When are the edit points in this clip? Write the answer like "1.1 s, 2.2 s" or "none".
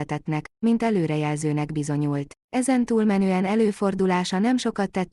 2.4 s